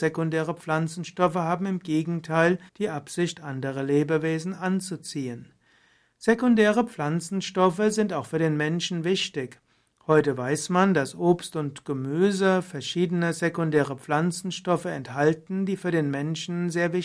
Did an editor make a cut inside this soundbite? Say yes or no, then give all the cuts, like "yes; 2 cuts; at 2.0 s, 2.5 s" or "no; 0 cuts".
yes; 1 cut; at 2.7 s